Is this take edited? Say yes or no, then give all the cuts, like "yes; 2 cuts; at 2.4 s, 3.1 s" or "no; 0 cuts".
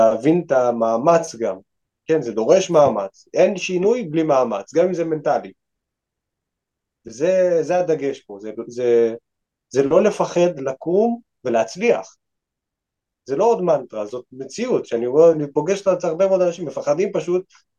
no; 0 cuts